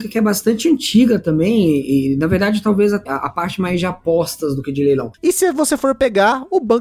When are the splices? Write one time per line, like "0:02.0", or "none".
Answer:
0:03.1
0:05.2